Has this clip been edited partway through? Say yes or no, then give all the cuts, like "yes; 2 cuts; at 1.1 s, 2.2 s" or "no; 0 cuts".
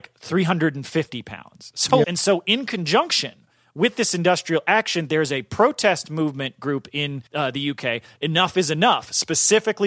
yes; 2 cuts; at 2.0 s, 7.3 s